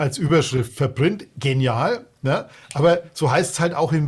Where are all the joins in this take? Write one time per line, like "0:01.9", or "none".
none